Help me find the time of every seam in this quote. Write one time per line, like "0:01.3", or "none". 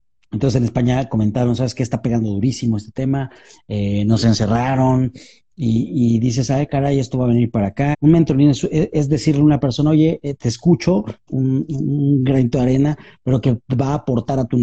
0:07.9
0:11.3